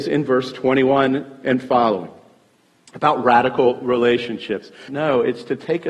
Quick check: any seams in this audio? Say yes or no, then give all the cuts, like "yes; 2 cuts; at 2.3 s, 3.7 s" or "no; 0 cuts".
yes; 1 cut; at 4.9 s